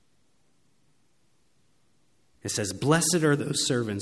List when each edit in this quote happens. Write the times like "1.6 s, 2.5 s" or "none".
2.4 s